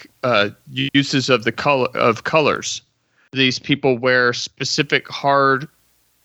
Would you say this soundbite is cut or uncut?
uncut